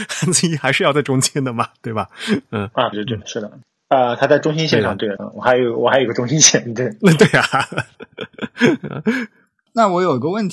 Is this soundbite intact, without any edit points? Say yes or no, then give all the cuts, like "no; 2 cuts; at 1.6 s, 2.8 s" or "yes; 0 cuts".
no; 2 cuts; at 2.9 s, 5.2 s